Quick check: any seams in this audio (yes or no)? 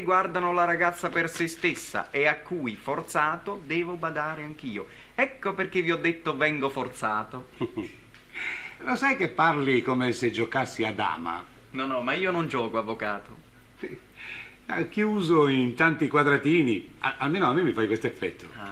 yes